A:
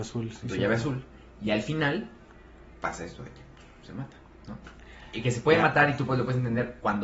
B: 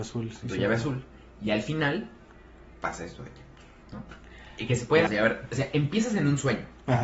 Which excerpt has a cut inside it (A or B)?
B